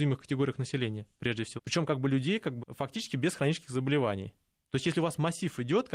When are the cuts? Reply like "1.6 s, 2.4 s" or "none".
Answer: 1.6 s, 2.6 s